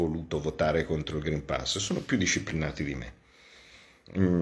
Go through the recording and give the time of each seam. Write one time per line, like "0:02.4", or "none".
none